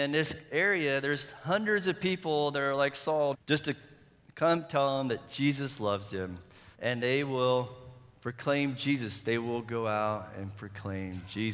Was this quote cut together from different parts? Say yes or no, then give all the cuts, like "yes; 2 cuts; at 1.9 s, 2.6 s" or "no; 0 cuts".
yes; 2 cuts; at 3.3 s, 6.7 s